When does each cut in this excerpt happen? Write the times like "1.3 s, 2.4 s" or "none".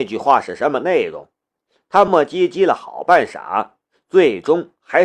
2.1 s